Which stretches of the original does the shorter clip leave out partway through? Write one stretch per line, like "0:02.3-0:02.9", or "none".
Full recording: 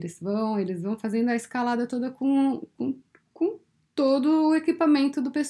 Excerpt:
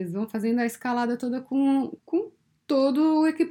0:02.7-0:03.3